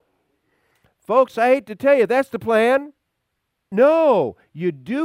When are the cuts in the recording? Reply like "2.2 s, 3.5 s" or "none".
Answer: 3.7 s